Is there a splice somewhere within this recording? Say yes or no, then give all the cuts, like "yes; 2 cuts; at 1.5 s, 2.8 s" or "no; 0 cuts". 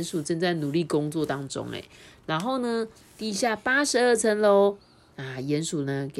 no; 0 cuts